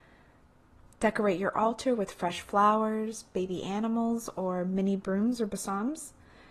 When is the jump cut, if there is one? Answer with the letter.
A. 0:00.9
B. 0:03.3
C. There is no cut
A